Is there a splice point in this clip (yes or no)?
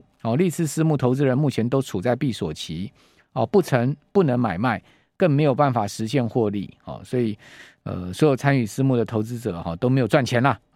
no